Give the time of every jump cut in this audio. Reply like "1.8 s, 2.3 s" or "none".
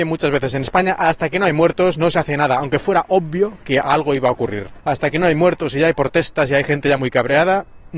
4.8 s

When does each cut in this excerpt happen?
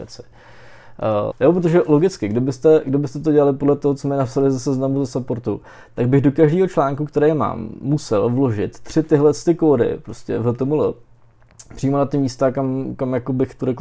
1.3 s

